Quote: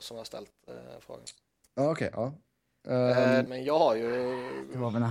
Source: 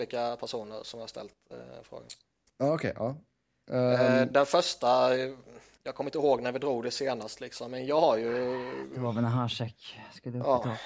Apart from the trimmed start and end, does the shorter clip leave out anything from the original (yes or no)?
yes